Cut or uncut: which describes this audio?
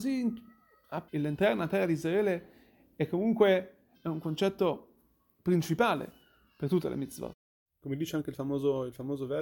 cut